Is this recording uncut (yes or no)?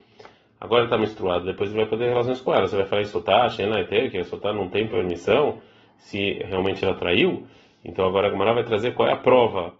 yes